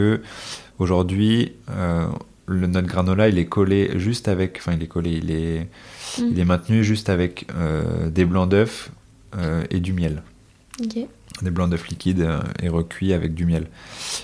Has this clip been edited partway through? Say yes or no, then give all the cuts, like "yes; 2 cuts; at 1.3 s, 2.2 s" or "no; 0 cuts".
no; 0 cuts